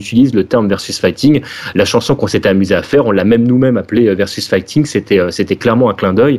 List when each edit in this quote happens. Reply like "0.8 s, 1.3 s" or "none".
none